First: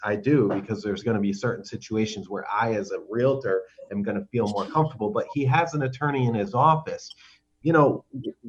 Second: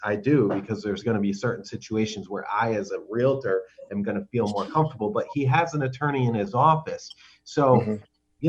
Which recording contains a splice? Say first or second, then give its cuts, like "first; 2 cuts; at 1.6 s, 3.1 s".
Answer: first; 1 cut; at 7.4 s